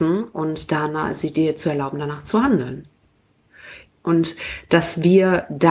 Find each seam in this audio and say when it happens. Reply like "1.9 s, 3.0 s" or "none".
3.9 s